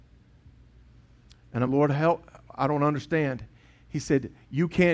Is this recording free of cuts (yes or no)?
no